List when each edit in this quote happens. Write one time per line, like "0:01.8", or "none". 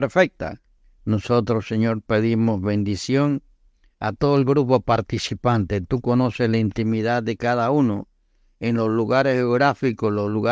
0:01.0